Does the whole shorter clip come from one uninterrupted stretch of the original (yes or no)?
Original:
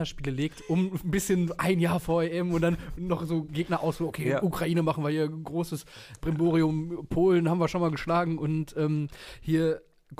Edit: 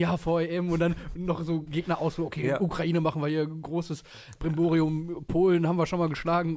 yes